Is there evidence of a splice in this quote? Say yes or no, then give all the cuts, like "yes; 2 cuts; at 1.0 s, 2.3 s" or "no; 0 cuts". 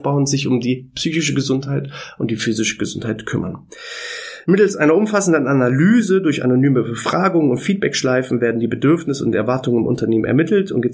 no; 0 cuts